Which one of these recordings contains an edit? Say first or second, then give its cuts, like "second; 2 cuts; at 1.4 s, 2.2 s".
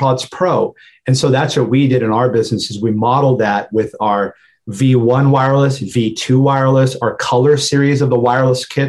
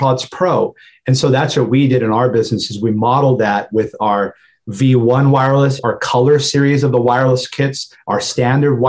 second; 1 cut; at 5.8 s